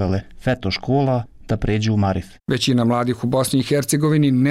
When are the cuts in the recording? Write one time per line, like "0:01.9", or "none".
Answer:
0:02.4